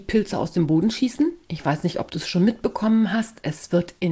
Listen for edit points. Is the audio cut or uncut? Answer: uncut